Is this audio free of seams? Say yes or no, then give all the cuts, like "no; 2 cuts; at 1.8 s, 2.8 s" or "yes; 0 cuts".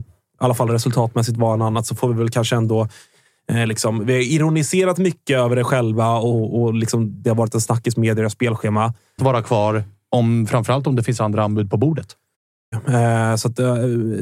no; 2 cuts; at 9.2 s, 12.7 s